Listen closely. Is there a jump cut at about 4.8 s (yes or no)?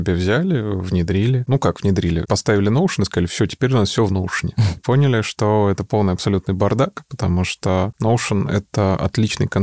yes